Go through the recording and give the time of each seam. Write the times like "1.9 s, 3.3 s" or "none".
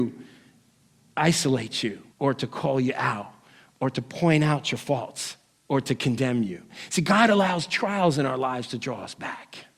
2.1 s